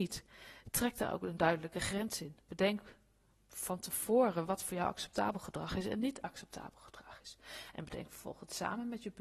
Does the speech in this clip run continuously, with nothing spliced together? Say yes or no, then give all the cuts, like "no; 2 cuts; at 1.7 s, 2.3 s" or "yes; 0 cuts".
yes; 0 cuts